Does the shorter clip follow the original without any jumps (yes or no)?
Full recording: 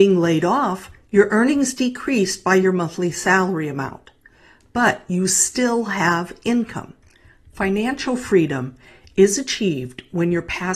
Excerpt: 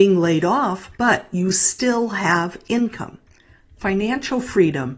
no